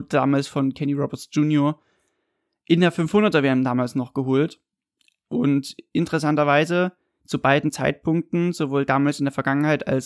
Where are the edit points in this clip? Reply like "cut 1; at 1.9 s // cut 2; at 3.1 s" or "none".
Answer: none